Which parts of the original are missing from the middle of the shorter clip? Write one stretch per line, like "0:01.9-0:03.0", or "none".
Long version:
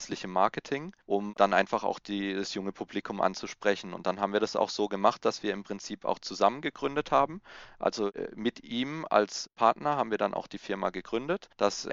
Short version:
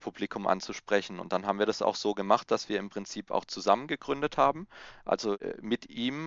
none